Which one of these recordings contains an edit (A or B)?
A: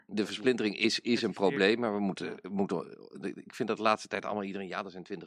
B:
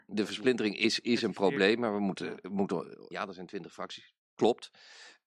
B